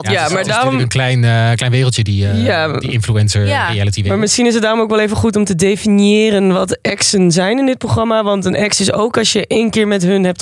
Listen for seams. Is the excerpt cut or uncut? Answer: uncut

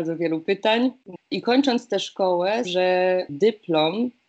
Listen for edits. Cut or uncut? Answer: cut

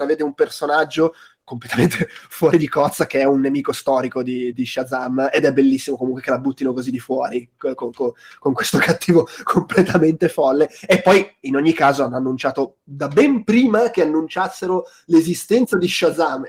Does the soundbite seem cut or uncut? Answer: cut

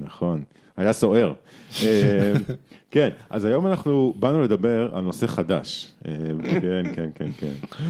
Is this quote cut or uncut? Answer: cut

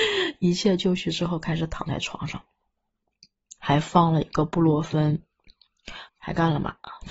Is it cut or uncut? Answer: cut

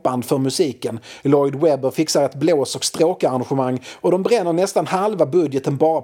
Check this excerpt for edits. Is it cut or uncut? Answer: uncut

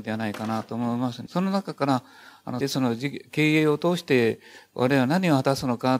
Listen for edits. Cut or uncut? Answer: cut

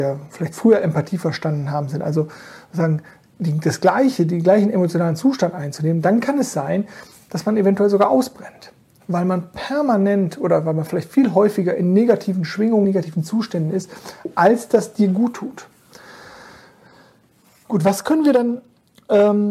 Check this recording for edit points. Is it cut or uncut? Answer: cut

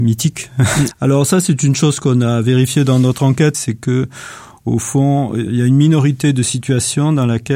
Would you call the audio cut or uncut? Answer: cut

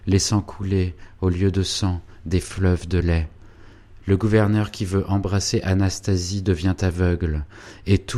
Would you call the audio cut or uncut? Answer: cut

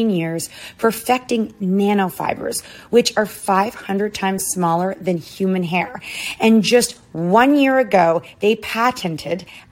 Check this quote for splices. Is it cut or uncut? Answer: uncut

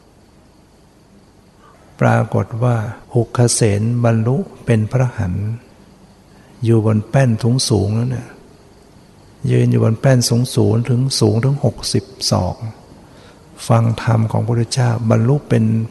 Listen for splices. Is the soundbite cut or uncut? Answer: cut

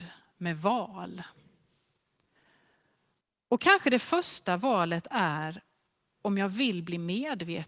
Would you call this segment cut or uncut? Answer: uncut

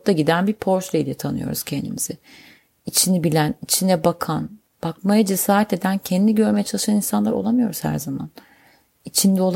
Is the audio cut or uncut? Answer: uncut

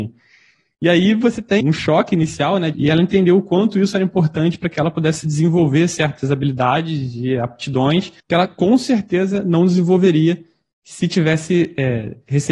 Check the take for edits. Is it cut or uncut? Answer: cut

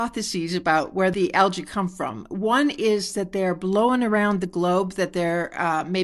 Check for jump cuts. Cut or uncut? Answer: uncut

